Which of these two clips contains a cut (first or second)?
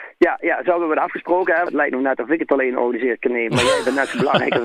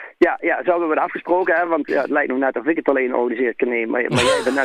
first